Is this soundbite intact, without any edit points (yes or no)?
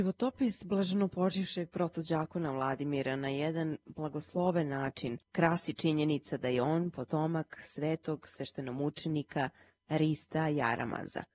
no